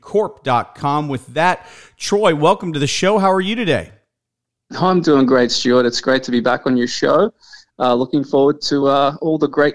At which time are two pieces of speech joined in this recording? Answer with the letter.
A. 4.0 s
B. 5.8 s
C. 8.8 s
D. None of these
D